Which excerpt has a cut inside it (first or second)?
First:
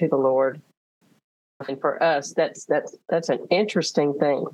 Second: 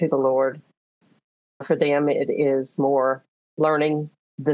first